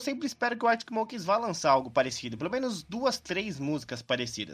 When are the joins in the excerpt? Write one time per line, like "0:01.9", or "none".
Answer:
none